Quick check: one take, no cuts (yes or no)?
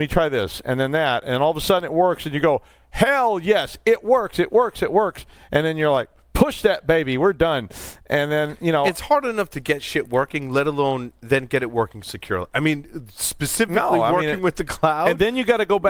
yes